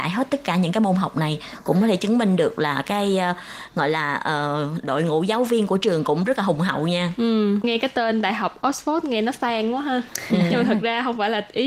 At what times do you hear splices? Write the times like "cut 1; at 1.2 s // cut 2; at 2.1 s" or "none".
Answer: none